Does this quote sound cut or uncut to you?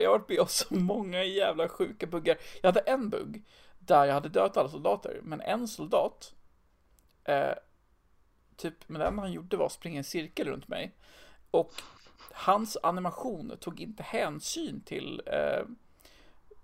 cut